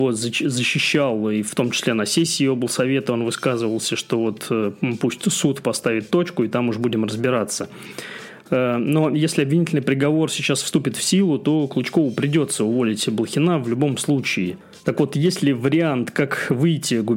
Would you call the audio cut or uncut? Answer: uncut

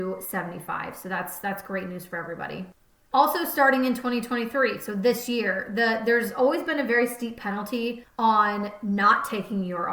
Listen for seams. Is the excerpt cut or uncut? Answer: uncut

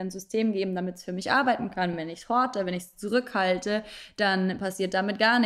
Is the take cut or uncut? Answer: uncut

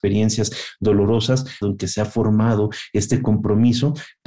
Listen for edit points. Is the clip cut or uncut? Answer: cut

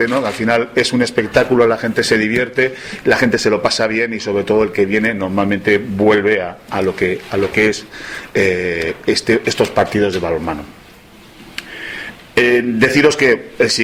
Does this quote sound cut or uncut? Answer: uncut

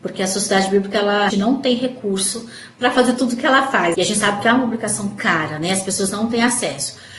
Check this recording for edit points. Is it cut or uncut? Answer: cut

